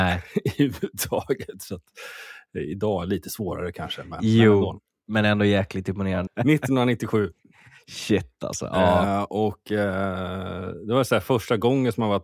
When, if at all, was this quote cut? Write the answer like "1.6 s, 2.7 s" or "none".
6.3 s